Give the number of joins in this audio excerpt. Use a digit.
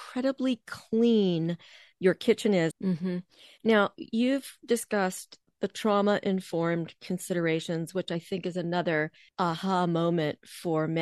1